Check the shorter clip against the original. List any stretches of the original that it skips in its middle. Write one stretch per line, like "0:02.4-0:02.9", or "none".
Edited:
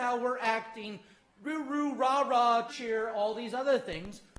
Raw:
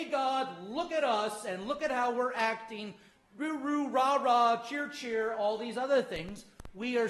0:04.6-0:04.9

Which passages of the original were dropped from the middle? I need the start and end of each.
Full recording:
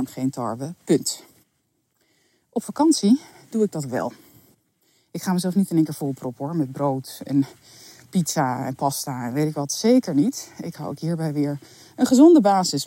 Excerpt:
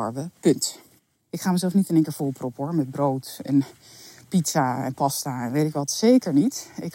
0:01.7-0:05.1

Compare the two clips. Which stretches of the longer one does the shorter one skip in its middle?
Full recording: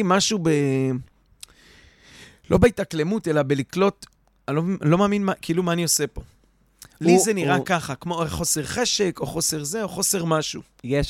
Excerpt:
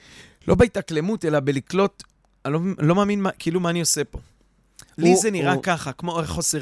none

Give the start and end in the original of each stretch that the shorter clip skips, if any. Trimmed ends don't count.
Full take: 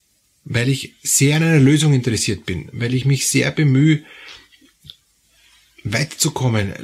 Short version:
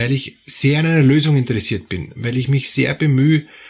none

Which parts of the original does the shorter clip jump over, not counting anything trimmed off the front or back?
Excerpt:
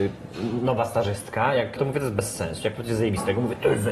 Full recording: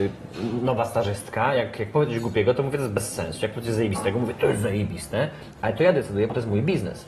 0:01.8-0:02.5

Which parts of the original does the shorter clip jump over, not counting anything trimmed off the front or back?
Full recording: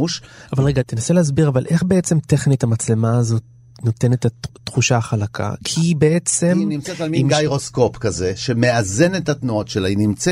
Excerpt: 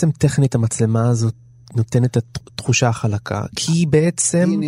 none

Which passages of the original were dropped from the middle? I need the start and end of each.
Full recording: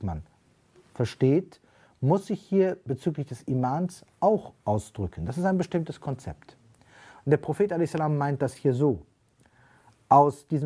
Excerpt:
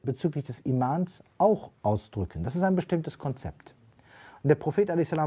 none

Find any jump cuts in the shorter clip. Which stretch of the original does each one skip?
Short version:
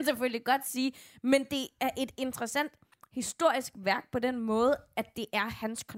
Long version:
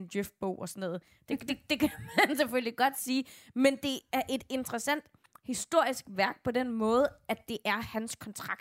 none

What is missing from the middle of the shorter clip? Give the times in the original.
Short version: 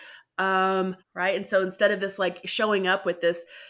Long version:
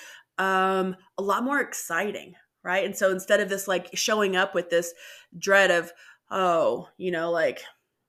0:01.0-0:02.5

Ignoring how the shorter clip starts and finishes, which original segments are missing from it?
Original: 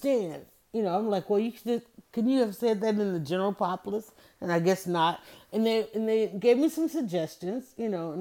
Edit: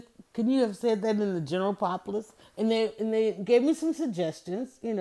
0:04.2-0:05.4

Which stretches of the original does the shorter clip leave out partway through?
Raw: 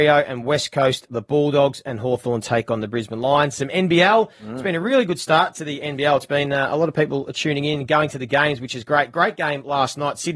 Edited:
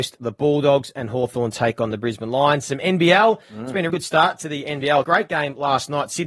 0:04.8-0:05.1
0:06.2-0:09.1

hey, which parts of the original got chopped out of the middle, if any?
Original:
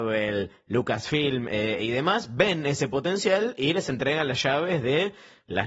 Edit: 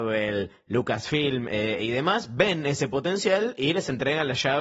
none

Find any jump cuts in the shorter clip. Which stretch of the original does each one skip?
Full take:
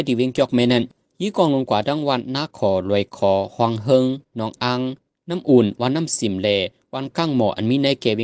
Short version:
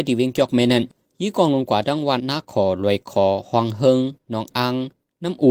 0:02.2-0:02.3

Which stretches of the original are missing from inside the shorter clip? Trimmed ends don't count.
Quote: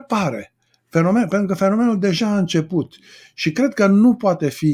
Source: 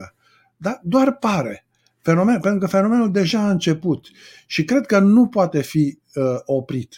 none

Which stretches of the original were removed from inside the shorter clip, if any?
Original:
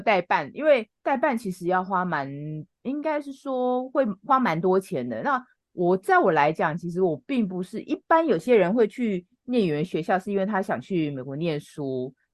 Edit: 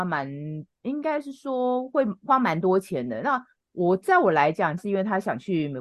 0:06.8-0:10.2

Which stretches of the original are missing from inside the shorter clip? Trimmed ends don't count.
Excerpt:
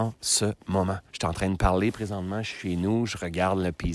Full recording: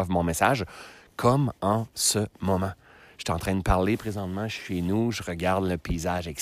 0:02.8-0:03.1

